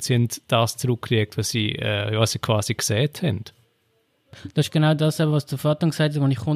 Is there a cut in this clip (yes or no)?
no